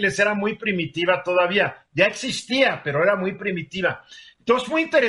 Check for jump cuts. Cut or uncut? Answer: uncut